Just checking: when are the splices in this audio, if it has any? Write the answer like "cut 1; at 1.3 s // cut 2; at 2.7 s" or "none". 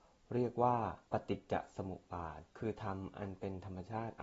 cut 1; at 1.1 s // cut 2; at 2.5 s